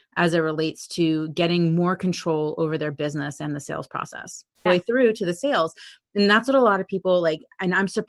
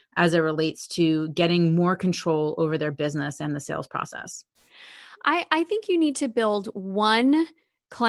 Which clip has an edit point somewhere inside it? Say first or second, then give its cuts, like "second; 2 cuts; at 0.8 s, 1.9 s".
first; 1 cut; at 4.7 s